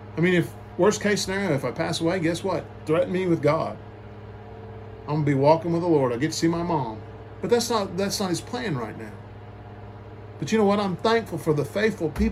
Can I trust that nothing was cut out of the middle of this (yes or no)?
yes